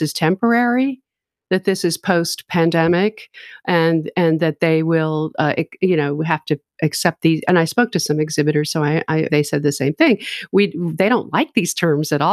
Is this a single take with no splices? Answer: no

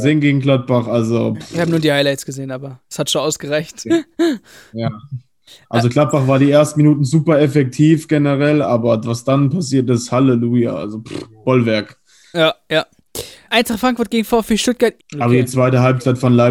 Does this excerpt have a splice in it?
yes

